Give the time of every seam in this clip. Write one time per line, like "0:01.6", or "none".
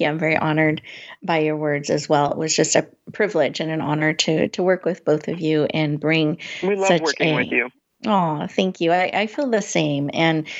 none